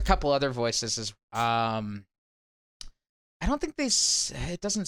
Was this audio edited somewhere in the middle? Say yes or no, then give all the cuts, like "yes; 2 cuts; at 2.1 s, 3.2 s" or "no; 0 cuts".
yes; 1 cut; at 1.2 s